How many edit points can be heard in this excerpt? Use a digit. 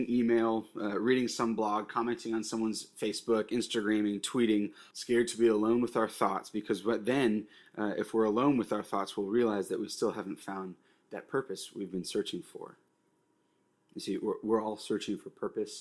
1